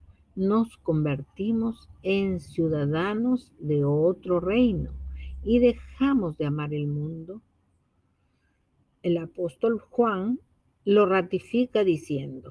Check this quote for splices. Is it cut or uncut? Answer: uncut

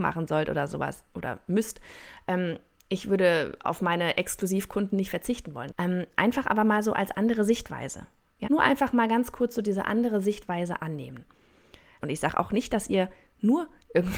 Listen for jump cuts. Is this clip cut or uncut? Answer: cut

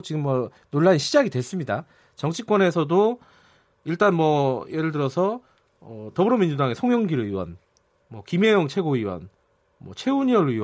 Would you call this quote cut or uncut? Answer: uncut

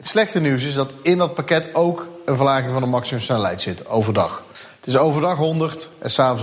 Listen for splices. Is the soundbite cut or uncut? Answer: uncut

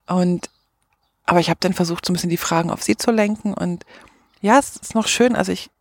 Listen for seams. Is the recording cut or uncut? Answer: uncut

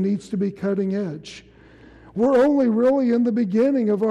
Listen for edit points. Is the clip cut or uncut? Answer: uncut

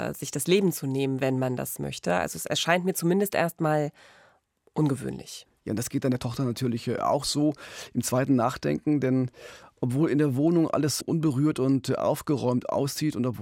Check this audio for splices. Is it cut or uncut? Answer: cut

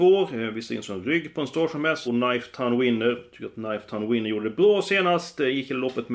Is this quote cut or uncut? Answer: cut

